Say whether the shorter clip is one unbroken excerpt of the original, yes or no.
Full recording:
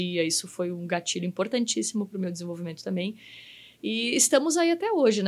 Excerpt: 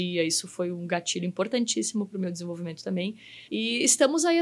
no